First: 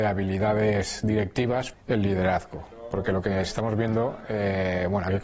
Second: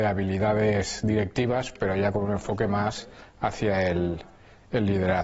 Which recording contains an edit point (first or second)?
first